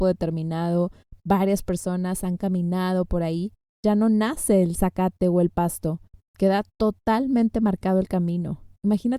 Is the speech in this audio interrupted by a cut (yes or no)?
no